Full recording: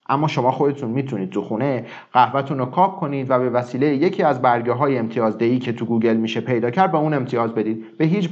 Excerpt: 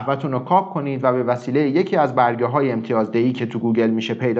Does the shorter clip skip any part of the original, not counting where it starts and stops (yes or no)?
no